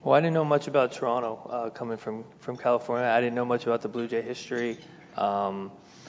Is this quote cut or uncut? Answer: uncut